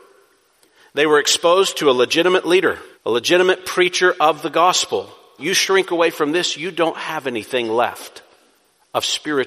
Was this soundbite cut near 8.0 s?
no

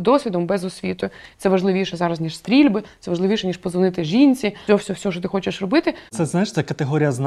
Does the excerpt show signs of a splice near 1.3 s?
yes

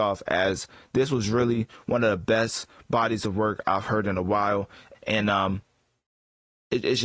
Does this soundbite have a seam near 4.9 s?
yes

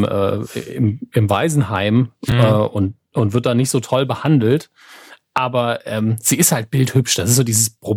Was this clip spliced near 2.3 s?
no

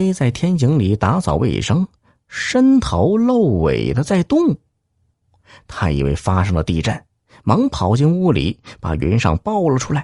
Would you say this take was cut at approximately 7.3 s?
no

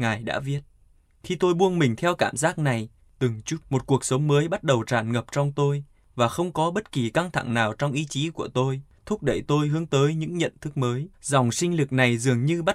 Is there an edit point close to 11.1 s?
yes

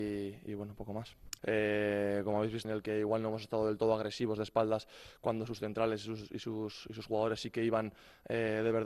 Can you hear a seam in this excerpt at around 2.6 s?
yes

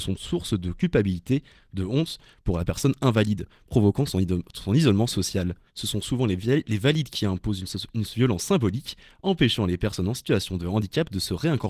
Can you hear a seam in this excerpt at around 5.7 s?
yes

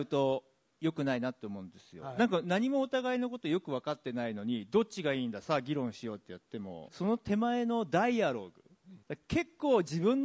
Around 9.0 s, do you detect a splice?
yes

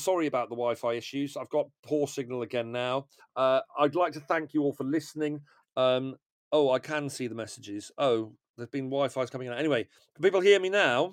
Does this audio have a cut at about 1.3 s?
no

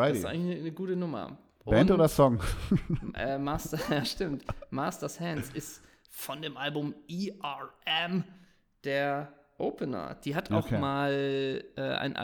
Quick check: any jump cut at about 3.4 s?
no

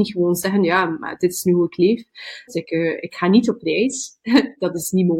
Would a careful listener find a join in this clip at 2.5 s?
yes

